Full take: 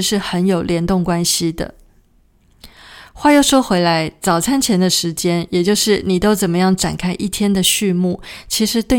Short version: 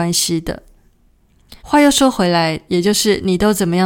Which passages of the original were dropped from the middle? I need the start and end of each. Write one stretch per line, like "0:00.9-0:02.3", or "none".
0:02.7-0:03.1
0:04.2-0:05.5